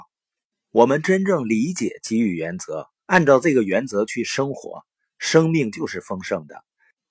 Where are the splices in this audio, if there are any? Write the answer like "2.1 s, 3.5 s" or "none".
none